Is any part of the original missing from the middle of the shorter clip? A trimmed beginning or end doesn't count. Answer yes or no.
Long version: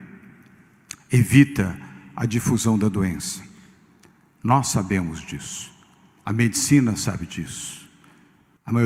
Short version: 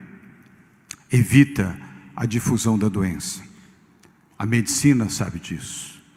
yes